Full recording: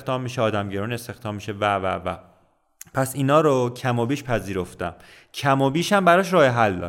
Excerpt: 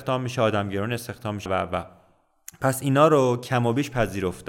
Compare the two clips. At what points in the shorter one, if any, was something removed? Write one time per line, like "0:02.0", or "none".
0:01.5